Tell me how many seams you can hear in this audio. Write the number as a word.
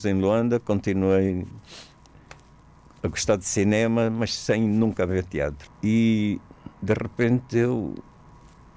two